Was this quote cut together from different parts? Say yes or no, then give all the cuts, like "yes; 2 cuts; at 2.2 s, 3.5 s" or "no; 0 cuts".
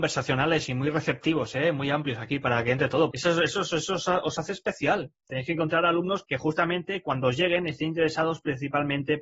yes; 2 cuts; at 3.1 s, 6.2 s